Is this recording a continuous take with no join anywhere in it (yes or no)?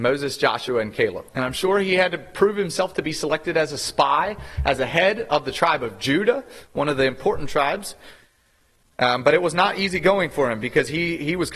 no